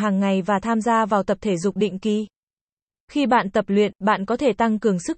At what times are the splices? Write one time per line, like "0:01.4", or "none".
0:02.9